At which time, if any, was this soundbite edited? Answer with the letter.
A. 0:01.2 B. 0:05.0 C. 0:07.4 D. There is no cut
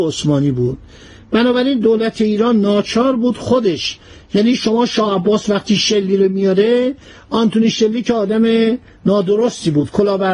D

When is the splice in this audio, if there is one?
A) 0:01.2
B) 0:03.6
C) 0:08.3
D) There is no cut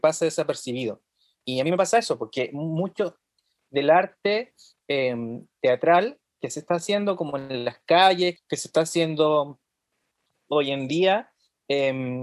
C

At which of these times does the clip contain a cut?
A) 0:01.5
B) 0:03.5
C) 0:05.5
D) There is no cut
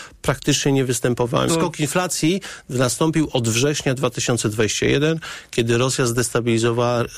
A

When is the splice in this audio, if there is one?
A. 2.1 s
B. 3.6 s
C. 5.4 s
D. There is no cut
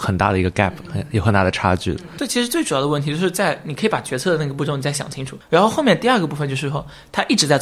C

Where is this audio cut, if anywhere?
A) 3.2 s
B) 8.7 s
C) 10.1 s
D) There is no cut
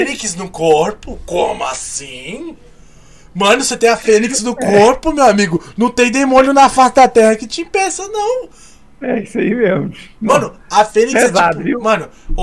D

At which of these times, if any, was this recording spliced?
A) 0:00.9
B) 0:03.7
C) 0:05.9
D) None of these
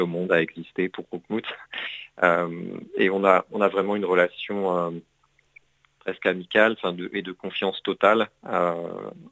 A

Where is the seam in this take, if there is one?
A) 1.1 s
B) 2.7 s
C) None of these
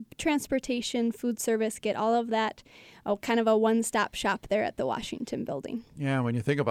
C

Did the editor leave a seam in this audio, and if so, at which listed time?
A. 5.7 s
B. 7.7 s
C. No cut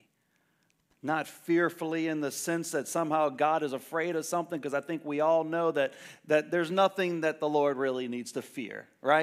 C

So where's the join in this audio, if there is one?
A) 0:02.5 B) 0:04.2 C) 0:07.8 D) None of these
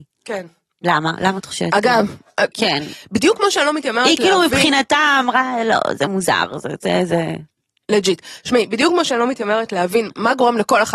A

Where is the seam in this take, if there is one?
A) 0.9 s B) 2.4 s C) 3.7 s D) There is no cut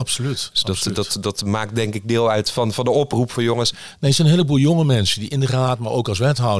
C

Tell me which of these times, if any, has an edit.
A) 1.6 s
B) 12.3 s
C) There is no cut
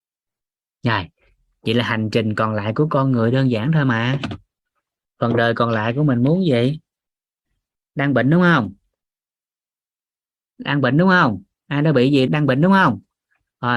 B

